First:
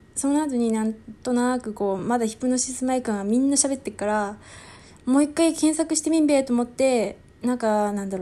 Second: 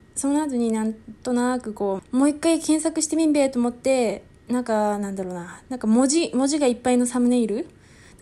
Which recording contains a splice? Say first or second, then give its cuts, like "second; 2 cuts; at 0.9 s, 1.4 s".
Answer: second; 1 cut; at 2.0 s